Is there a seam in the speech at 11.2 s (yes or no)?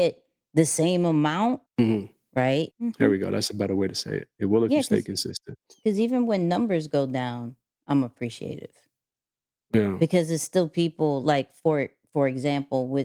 no